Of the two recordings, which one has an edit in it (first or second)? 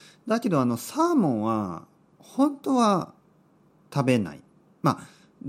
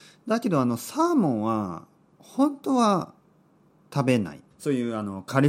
second